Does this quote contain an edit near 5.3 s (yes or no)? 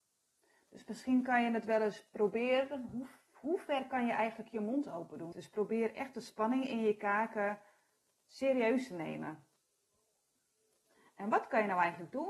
yes